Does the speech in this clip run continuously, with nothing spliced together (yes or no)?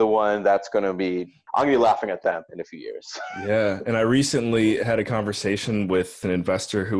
no